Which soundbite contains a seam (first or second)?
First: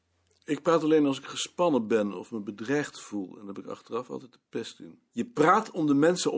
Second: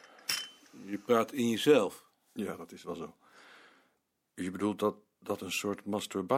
first